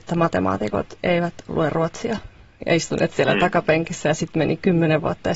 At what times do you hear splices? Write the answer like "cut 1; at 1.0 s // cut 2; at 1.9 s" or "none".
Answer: none